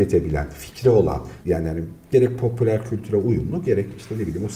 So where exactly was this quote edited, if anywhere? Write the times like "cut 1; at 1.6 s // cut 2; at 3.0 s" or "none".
cut 1; at 1.4 s